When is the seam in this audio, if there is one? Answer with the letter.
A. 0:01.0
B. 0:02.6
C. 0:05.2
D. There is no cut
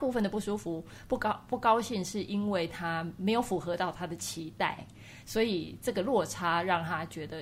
D